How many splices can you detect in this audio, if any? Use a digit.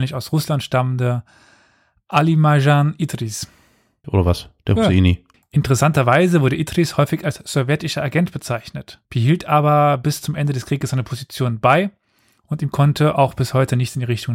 3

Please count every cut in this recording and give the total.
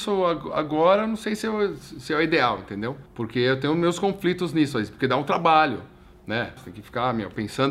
2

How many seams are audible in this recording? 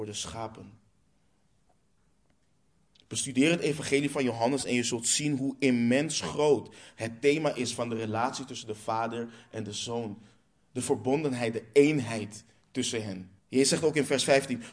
1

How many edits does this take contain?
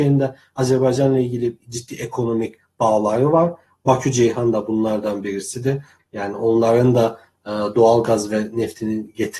1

